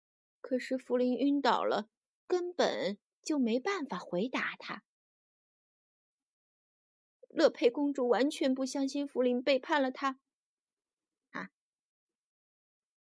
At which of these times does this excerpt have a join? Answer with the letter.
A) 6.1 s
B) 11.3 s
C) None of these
B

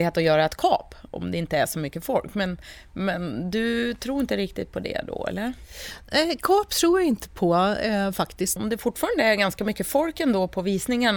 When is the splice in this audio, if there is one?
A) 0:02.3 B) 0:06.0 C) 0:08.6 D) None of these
C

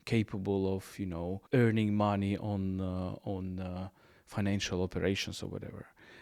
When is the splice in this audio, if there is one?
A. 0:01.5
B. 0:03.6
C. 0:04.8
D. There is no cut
A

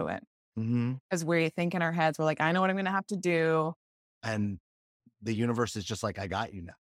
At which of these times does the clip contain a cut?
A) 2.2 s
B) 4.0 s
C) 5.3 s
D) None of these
B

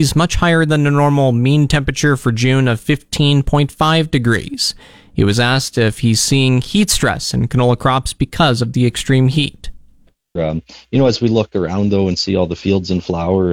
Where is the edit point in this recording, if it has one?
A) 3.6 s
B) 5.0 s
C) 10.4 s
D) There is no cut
C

